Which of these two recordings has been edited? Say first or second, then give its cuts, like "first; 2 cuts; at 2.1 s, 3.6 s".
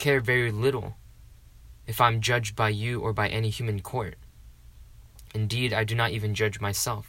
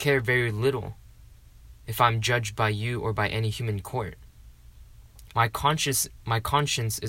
second; 1 cut; at 5.3 s